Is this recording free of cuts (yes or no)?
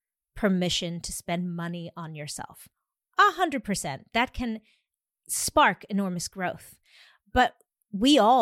yes